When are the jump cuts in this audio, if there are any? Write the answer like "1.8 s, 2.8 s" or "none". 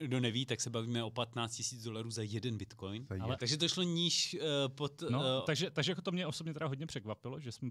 3.4 s